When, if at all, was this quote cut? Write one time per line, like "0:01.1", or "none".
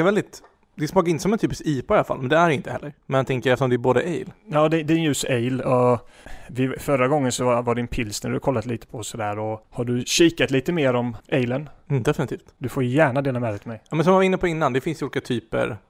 none

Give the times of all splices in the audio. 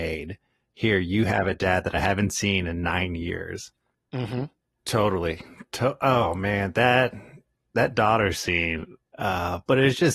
0:04.8
0:09.1

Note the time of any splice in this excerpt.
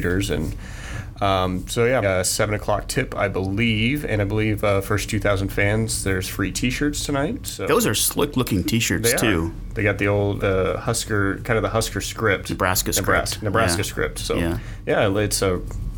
0:02.0
0:10.4

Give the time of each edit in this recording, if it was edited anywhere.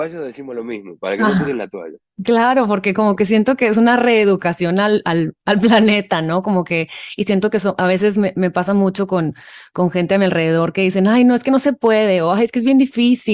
none

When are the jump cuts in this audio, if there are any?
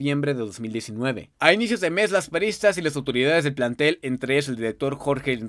0:01.3

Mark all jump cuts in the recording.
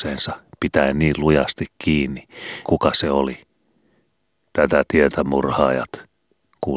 0:02.7

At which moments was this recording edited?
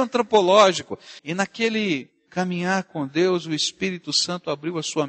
0:01.2

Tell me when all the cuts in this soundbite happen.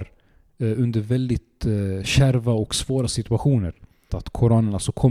0:04.1

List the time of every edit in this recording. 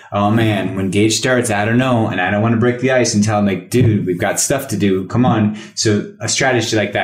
none

